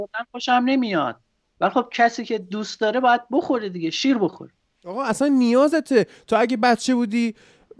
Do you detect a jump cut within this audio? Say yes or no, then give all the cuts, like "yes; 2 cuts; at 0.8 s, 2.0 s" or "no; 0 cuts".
no; 0 cuts